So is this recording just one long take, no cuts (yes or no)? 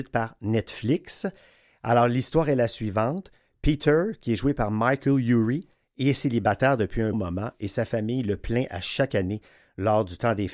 no